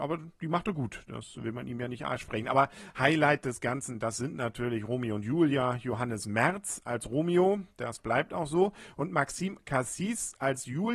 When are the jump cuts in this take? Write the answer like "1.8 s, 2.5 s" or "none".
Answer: none